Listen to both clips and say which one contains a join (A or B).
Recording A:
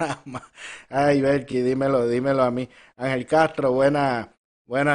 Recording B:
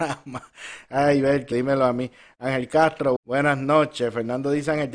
B